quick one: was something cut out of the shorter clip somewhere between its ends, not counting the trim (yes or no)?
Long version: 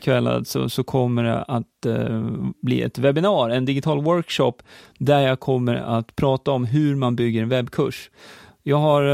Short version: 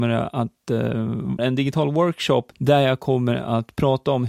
yes